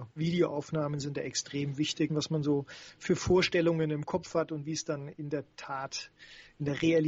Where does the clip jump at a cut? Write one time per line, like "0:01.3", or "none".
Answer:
0:02.1